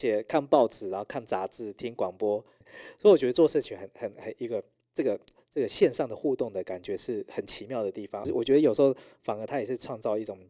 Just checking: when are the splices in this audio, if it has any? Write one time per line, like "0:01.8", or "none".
0:02.6
0:08.2